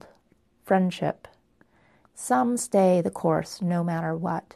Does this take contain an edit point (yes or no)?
yes